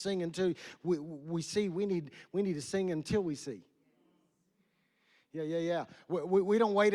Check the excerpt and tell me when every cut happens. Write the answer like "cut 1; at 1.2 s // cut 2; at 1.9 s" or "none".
none